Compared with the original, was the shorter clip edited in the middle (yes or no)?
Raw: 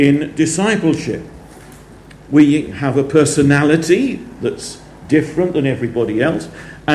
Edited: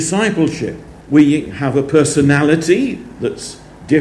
yes